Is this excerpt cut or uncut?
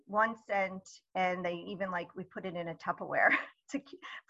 uncut